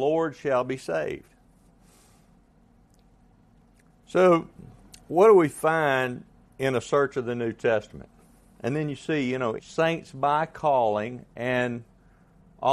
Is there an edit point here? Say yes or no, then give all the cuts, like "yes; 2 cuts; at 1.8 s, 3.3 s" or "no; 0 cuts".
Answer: yes; 2 cuts; at 8.6 s, 9.6 s